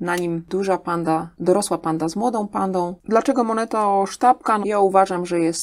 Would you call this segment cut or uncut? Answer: cut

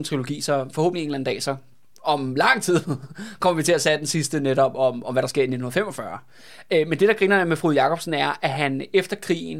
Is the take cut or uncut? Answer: uncut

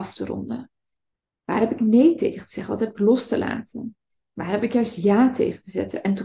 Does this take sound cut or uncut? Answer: uncut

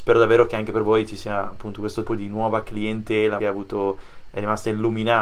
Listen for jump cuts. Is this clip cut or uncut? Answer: cut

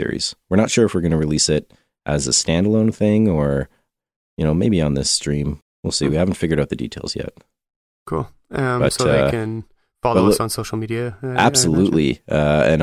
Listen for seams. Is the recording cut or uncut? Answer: cut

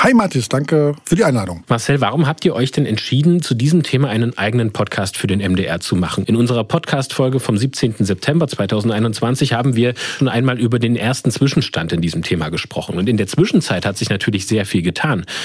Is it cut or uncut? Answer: cut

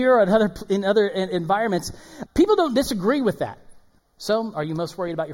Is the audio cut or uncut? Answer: cut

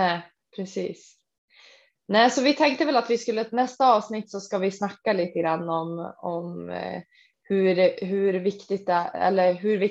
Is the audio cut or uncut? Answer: uncut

